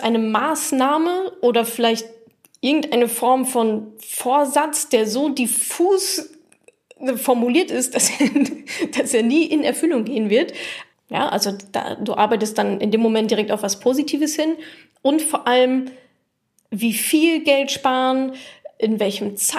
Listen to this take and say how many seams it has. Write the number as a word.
one